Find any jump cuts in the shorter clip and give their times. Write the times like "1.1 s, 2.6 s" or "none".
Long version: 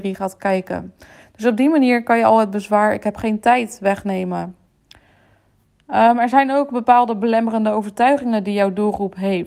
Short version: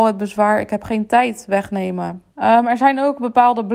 2.3 s